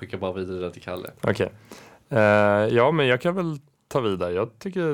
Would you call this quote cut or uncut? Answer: uncut